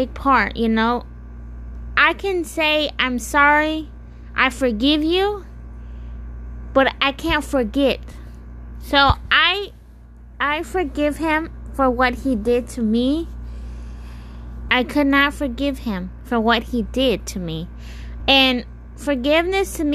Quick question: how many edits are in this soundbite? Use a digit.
2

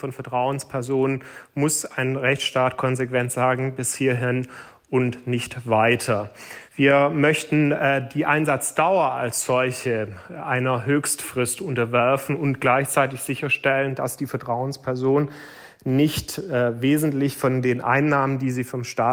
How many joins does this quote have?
0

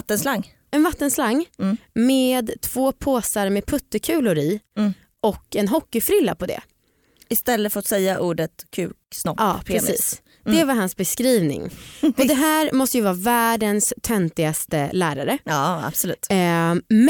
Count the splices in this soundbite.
0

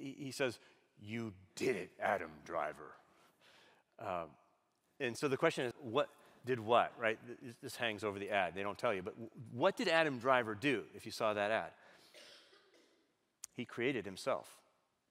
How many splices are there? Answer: 1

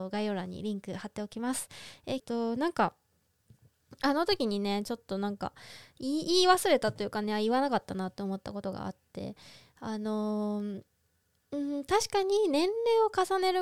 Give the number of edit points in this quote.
1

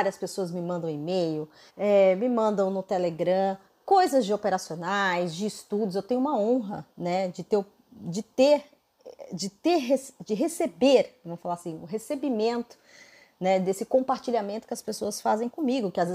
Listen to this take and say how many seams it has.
1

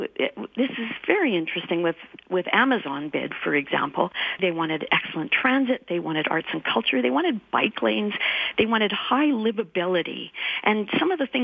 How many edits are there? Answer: 1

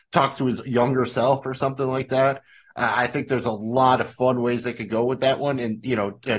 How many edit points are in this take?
0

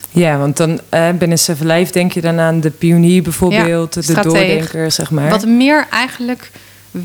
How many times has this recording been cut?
1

